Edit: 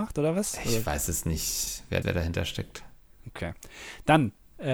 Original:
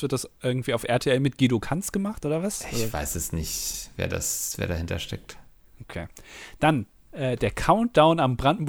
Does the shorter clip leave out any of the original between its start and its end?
yes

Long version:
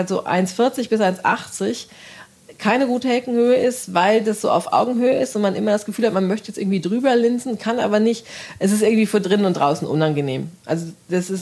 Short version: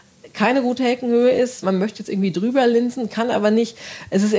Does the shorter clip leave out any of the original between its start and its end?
yes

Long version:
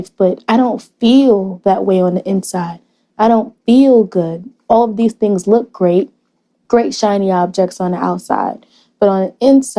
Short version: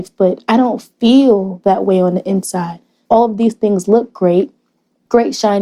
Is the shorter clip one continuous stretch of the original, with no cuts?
no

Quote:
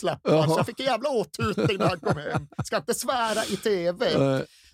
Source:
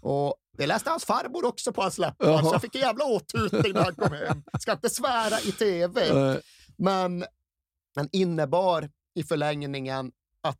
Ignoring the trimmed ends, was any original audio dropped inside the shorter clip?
no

